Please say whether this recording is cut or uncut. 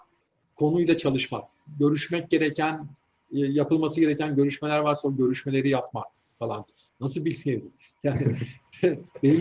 cut